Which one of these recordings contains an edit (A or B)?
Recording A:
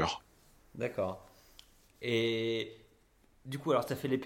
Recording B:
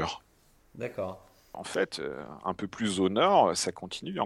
B